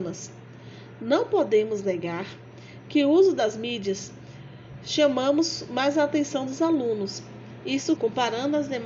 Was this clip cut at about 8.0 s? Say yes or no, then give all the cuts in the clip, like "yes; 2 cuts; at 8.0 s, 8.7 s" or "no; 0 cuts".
yes; 1 cut; at 8.0 s